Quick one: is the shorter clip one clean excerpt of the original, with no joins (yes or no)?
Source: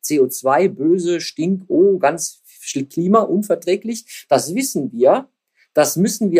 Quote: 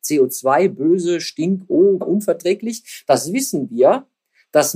no